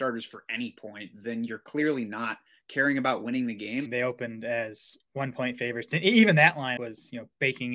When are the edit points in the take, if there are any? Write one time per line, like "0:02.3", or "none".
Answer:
0:03.9
0:06.8